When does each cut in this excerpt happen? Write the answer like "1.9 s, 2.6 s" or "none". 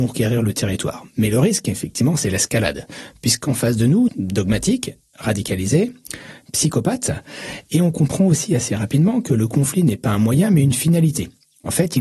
4.1 s